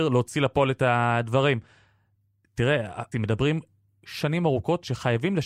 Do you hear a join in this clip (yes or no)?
yes